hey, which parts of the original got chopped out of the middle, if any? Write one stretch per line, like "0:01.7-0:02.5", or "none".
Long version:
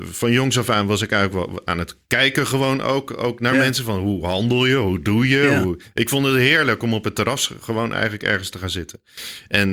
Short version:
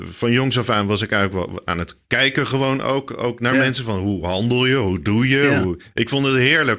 none